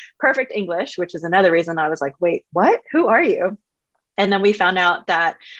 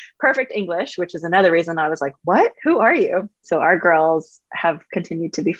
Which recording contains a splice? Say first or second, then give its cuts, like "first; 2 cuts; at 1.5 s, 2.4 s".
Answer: second; 2 cuts; at 2.2 s, 3.4 s